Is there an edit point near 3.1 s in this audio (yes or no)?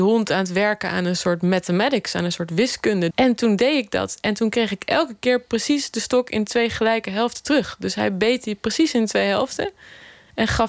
yes